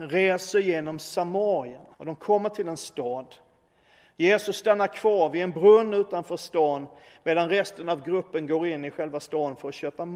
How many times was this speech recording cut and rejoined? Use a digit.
1